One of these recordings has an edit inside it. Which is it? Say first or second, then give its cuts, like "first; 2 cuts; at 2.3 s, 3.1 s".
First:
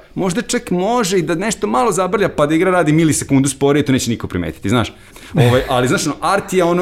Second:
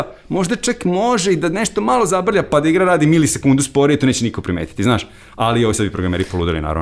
first; 1 cut; at 5.1 s